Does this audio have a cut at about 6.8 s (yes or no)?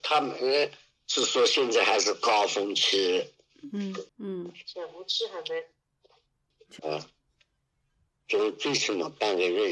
yes